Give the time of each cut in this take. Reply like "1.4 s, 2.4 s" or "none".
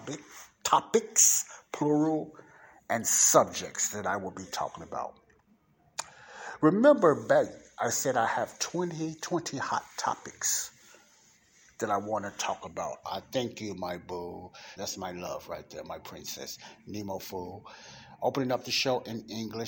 13.0 s, 14.8 s